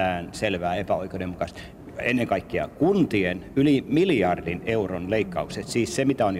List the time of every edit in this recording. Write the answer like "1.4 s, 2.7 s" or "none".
none